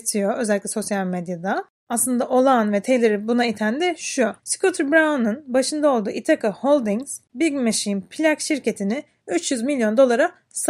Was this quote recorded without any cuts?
no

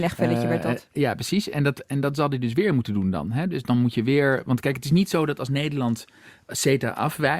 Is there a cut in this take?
no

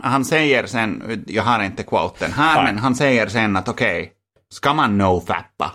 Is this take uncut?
yes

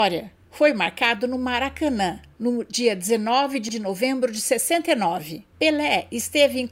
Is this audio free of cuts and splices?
no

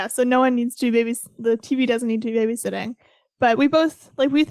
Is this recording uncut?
yes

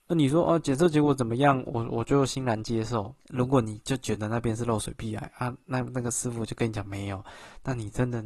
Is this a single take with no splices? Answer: no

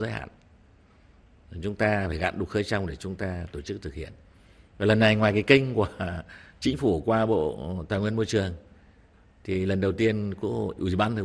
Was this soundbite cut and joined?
no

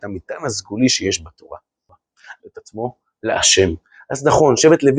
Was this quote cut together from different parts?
yes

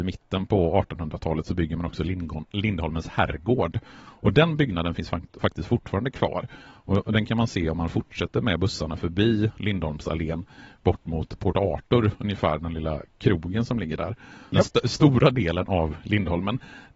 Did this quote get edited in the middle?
yes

